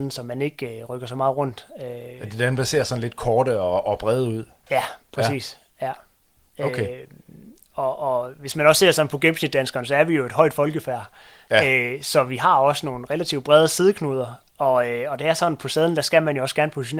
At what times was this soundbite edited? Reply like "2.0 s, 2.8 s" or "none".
none